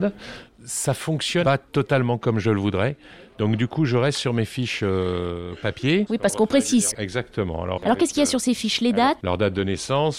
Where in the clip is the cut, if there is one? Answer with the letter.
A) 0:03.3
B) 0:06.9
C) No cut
B